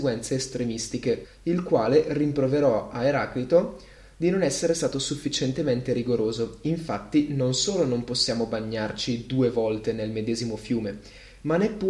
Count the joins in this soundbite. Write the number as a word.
one